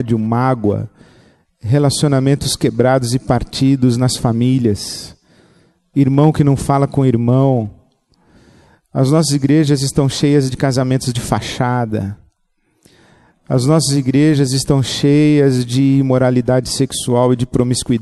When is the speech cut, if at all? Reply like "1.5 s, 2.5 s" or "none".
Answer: none